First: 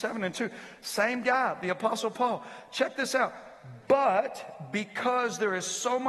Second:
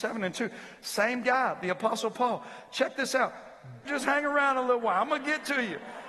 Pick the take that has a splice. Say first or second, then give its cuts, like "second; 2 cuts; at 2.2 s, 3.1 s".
second; 1 cut; at 3.9 s